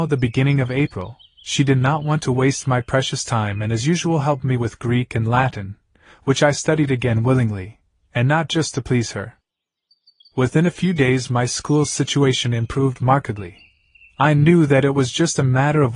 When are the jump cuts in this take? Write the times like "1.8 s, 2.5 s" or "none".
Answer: none

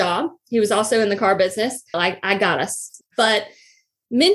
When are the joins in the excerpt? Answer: 1.9 s, 3.0 s

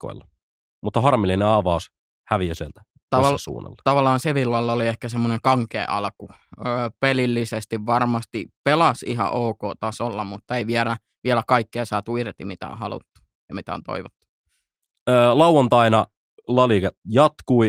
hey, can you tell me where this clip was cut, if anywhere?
none

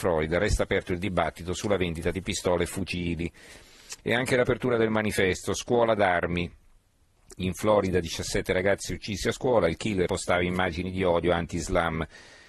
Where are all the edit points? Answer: 10.1 s

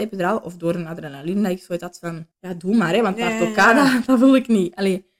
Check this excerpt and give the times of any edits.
2.3 s

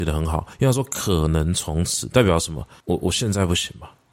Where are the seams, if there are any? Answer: none

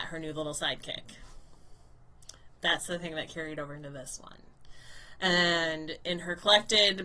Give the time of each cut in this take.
none

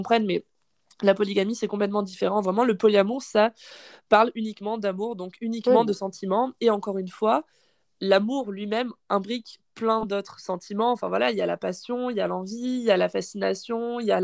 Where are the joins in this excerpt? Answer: none

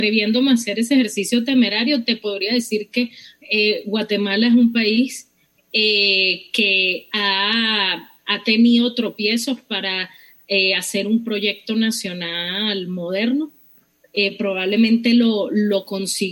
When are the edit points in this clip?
none

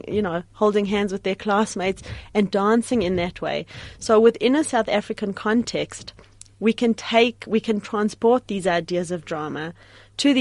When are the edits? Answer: none

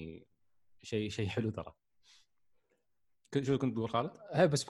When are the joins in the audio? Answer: none

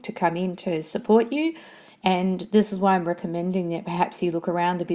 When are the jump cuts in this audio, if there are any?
none

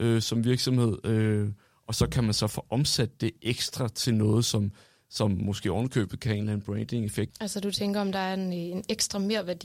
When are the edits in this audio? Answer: 7.3 s

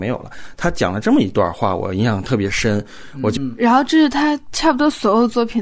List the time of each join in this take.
3.4 s

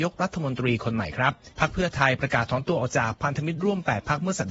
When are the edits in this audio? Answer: 1.5 s

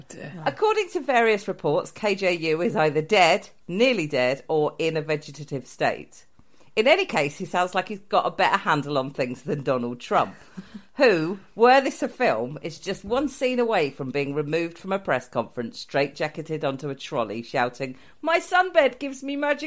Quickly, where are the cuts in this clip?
none

